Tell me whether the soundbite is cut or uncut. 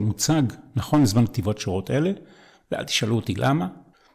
uncut